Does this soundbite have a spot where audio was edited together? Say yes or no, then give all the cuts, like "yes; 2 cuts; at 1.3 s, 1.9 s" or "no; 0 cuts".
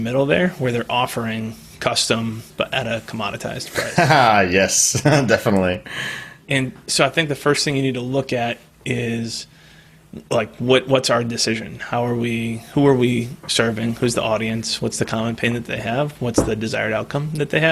yes; 1 cut; at 2.5 s